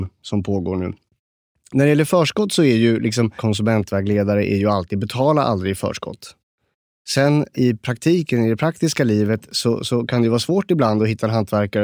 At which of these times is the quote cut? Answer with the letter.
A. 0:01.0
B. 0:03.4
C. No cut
B